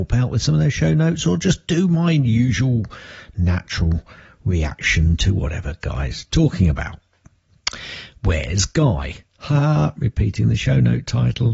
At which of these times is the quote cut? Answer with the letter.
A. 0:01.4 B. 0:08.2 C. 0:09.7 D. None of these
B